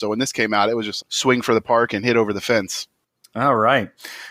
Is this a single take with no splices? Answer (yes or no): no